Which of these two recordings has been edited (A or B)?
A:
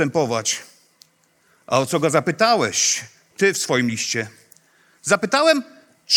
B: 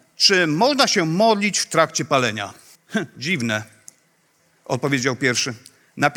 B